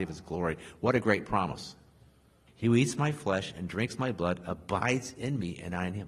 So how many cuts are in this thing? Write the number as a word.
one